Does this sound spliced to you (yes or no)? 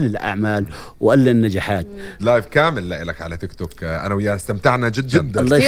yes